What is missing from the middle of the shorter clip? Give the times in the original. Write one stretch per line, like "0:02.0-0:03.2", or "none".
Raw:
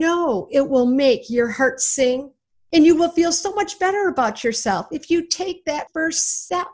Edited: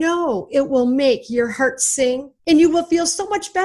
0:02.4-0:02.7